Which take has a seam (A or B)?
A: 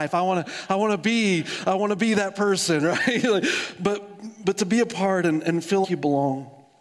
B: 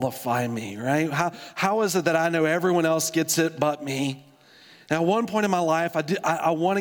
A